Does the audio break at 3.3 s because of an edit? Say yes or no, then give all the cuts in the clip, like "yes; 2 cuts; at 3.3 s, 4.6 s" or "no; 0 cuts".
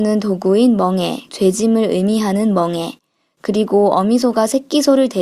no; 1 cut; at 1.3 s